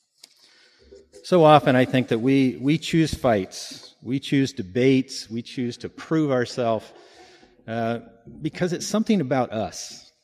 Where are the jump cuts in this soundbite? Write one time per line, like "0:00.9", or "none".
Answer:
none